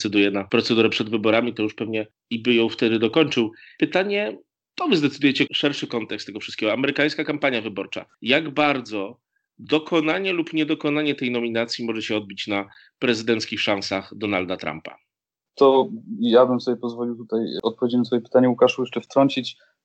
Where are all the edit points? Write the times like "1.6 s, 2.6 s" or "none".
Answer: 5.5 s